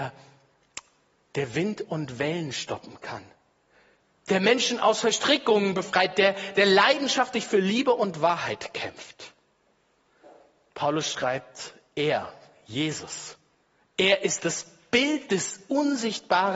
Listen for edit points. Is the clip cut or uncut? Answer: uncut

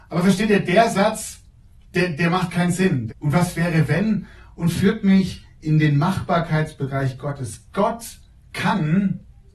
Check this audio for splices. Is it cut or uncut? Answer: cut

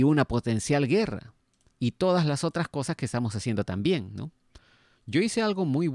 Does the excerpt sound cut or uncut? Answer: cut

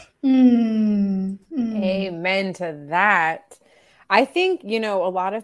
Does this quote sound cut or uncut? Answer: uncut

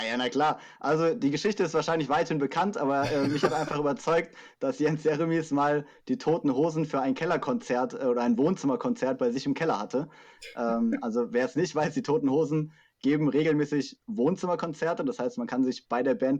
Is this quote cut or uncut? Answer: uncut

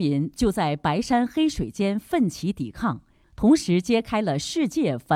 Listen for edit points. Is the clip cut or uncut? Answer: cut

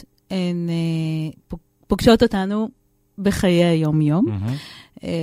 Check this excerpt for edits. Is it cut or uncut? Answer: uncut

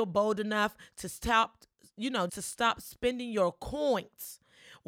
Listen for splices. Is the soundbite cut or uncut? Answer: cut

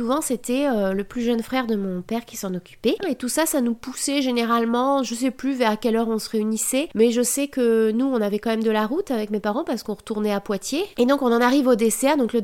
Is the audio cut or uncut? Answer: cut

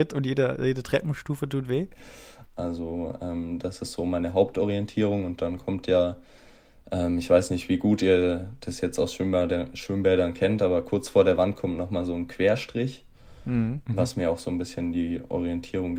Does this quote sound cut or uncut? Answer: cut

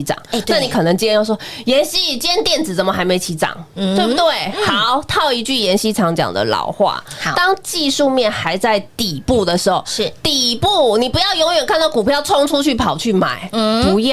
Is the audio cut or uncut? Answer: uncut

